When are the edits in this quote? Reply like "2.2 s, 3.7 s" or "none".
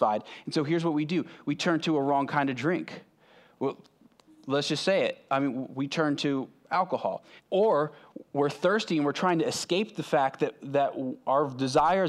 7.4 s